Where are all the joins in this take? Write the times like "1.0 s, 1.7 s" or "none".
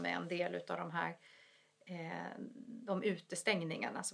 none